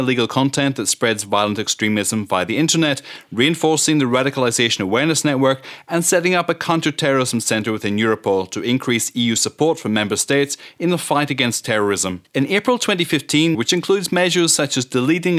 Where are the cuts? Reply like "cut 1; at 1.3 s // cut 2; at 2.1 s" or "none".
cut 1; at 12.3 s // cut 2; at 13.5 s